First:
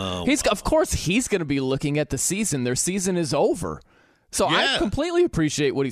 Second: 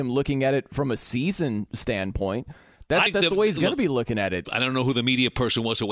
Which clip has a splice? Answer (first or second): second